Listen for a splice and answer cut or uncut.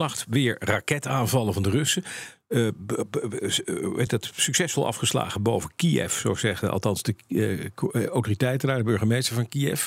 uncut